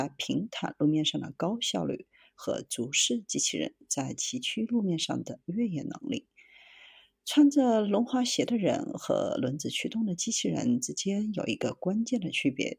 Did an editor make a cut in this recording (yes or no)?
no